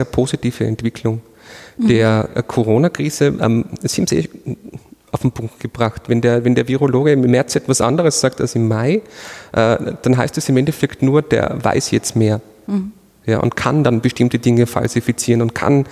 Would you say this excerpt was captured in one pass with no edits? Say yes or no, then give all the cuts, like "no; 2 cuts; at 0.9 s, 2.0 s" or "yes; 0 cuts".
yes; 0 cuts